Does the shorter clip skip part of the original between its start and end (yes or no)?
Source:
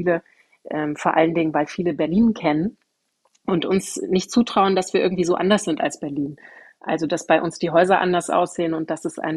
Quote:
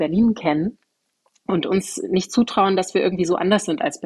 no